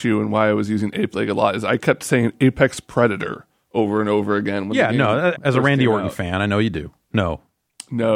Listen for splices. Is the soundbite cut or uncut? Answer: cut